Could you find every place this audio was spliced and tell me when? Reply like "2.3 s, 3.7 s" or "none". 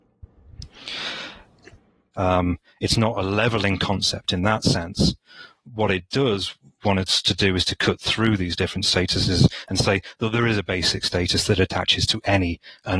2.1 s